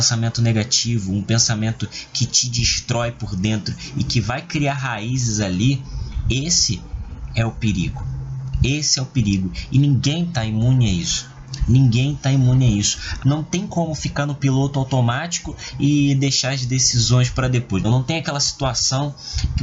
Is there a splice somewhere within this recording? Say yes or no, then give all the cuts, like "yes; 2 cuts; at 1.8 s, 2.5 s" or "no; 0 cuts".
yes; 2 cuts; at 13.2 s, 17.8 s